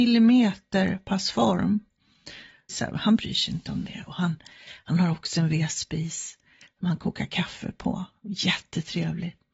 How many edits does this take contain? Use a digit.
1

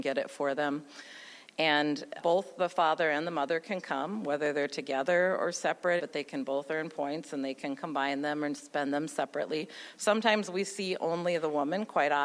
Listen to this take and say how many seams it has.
2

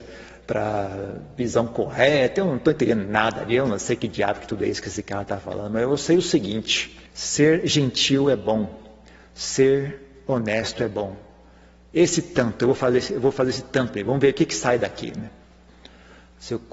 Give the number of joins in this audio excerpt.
1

